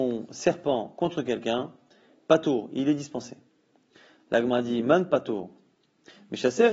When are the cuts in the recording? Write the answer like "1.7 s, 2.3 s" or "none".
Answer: none